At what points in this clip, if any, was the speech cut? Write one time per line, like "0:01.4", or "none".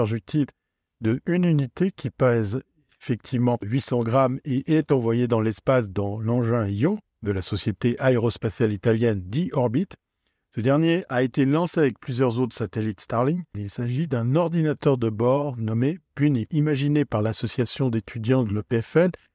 0:13.5